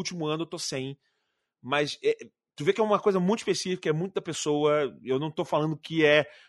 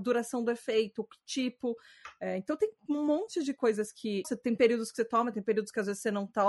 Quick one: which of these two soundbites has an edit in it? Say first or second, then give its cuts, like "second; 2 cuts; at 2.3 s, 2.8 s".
second; 1 cut; at 4.2 s